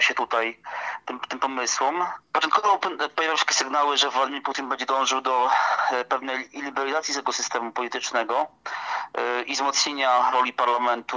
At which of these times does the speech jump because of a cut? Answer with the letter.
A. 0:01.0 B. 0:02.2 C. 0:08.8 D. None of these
B